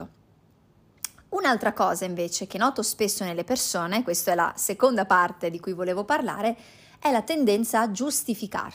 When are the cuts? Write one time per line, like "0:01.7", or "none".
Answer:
none